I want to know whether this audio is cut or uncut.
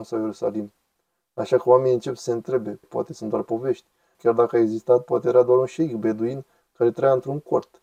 cut